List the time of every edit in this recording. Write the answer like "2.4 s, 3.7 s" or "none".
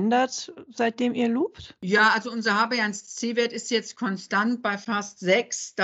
none